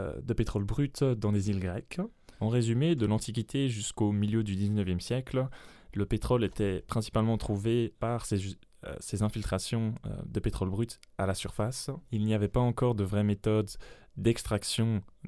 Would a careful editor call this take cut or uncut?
uncut